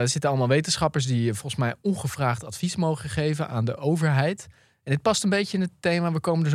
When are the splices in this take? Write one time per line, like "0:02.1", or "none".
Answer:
none